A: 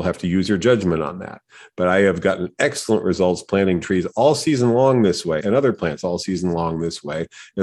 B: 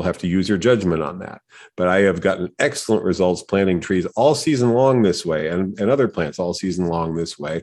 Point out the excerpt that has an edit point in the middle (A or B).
A